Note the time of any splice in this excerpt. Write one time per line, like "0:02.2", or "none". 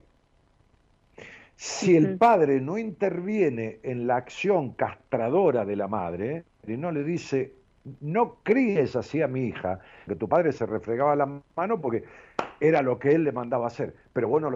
0:06.7
0:10.1